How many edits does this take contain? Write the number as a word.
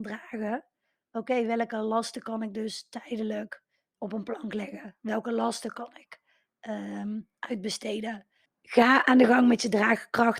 two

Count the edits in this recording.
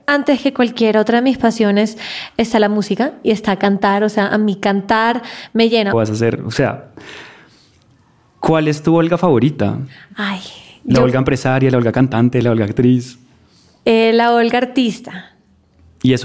one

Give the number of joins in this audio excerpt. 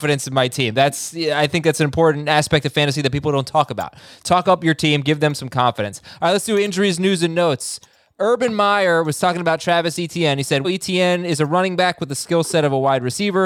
one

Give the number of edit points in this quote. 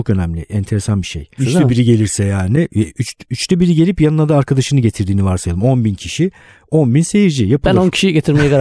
one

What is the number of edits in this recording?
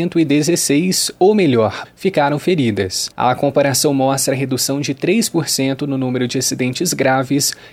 two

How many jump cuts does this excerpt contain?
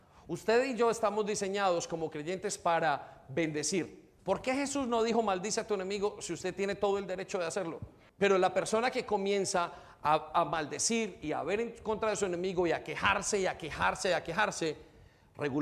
two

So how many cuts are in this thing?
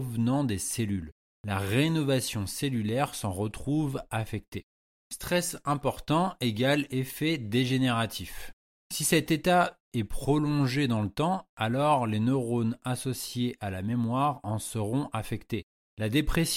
zero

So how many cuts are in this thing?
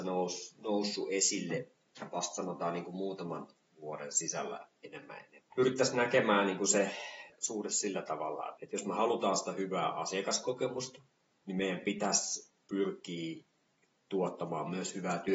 two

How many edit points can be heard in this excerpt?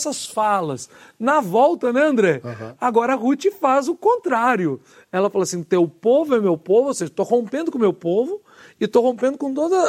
zero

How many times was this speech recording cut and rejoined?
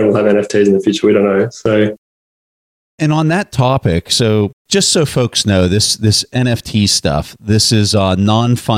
zero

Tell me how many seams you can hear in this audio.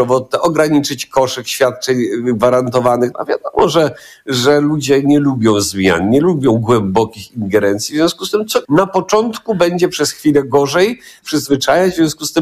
three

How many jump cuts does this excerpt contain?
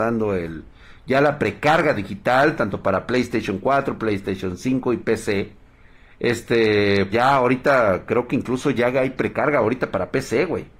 one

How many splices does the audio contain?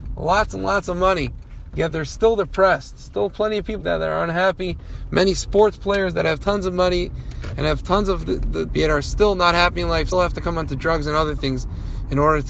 three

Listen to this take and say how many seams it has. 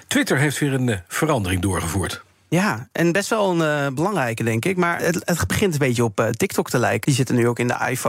two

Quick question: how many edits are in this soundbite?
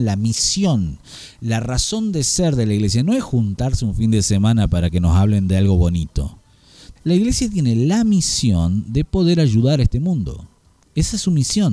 one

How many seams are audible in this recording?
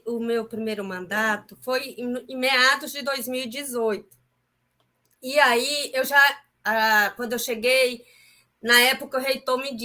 zero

